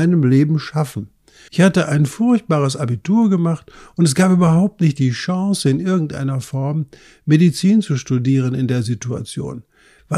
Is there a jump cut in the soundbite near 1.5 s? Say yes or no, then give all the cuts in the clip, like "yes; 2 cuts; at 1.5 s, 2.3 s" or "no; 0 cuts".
yes; 1 cut; at 1.5 s